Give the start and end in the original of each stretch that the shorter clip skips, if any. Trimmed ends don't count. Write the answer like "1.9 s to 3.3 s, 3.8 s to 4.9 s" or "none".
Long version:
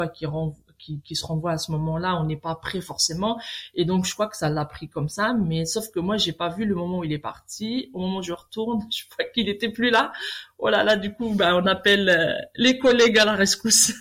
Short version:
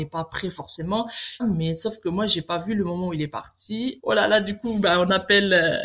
3.7 s to 5.3 s, 7.9 s to 10.5 s